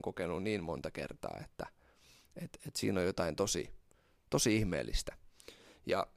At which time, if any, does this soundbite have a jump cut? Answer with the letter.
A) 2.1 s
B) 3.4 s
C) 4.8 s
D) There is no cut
D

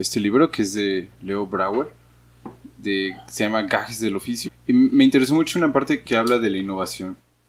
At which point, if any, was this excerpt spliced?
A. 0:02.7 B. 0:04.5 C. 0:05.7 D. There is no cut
B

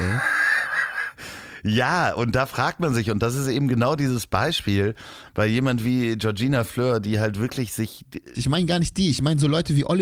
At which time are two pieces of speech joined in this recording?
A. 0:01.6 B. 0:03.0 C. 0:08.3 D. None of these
C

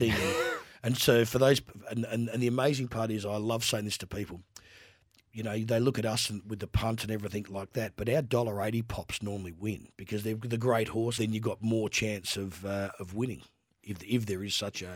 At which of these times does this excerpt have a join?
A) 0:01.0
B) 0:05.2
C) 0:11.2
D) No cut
C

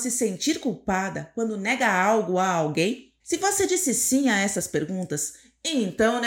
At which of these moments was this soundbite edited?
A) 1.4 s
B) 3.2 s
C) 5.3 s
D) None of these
B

